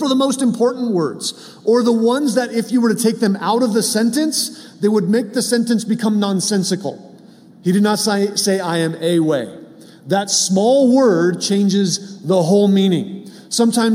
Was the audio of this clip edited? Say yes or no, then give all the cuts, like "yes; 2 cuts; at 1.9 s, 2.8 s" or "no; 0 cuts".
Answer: yes; 1 cut; at 7.5 s